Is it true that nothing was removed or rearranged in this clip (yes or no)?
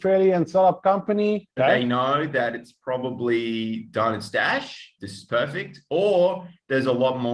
no